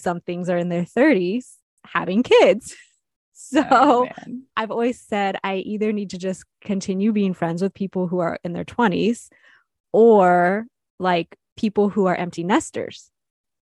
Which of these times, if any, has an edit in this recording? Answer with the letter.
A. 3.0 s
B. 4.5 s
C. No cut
B